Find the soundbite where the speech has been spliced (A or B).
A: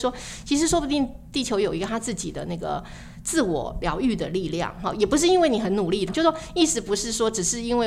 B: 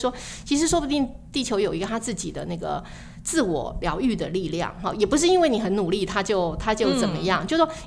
A